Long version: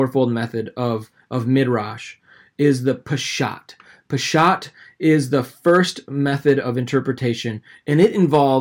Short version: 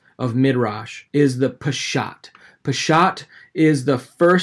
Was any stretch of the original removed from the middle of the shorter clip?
yes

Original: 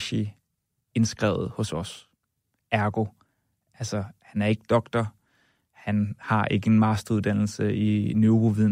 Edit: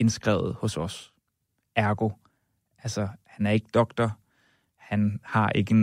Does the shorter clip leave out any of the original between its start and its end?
no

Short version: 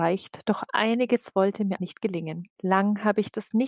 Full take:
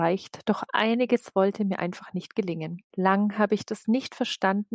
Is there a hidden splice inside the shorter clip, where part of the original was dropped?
yes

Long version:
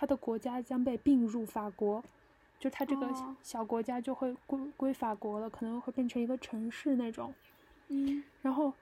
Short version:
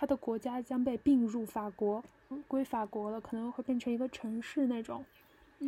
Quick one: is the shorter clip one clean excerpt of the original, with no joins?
no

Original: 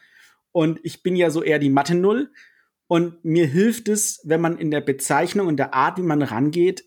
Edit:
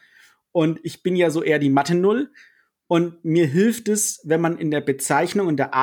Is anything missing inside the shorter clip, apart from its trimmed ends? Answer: no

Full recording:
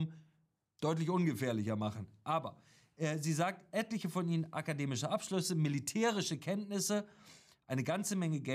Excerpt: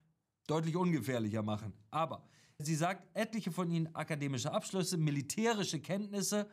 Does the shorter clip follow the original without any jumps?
no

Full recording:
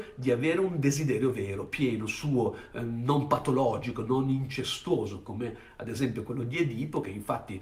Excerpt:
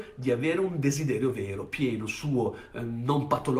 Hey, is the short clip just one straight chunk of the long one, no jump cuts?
yes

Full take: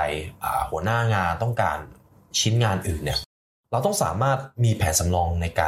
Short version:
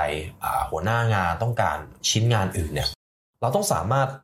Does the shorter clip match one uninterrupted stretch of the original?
no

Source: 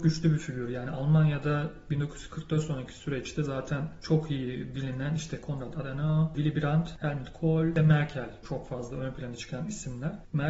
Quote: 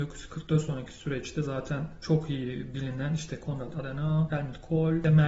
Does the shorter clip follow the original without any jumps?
no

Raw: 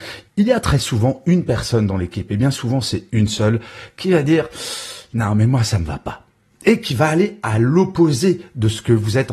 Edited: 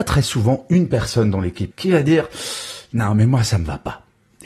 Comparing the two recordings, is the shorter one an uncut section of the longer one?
no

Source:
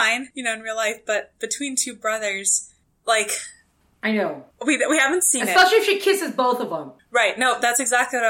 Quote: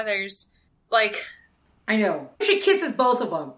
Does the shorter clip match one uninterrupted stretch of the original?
no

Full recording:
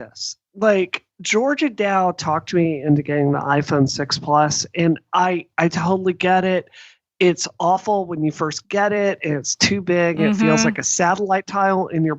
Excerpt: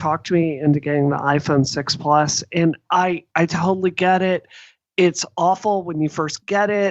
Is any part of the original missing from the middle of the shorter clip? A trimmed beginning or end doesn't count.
no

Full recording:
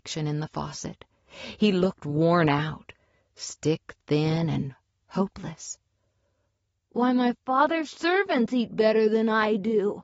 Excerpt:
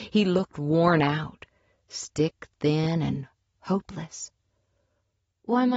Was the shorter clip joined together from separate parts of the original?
no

